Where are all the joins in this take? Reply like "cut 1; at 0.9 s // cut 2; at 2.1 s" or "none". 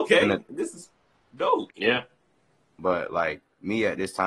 cut 1; at 1.7 s